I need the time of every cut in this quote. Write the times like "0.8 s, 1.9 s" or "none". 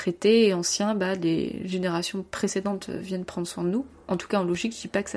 none